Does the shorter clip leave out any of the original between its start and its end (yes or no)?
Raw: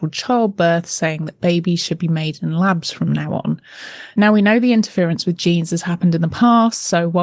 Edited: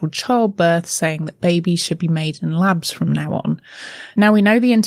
no